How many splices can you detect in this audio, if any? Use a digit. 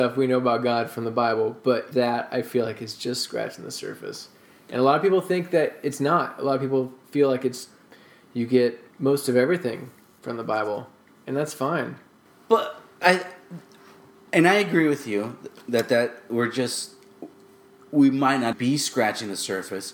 2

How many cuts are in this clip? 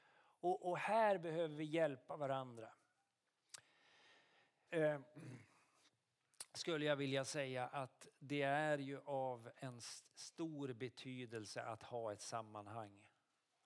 1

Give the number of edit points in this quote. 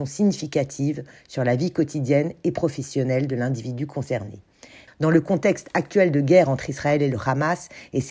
1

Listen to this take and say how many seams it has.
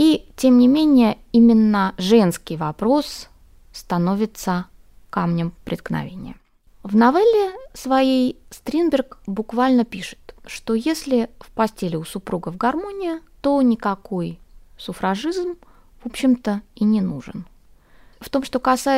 1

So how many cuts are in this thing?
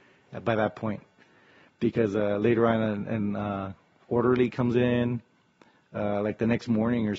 0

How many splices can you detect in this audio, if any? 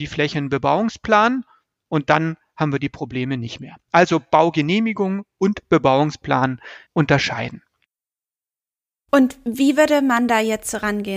1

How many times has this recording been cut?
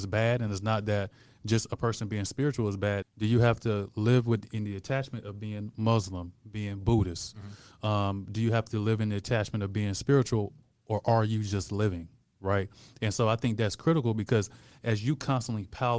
1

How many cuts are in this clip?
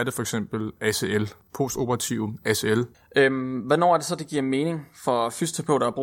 1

